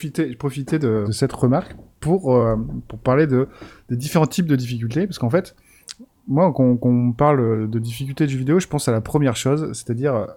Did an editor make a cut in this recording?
yes; 1 cut; at 1.1 s

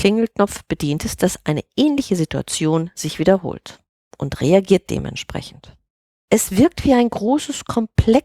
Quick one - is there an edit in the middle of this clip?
yes; 1 cut; at 6.1 s

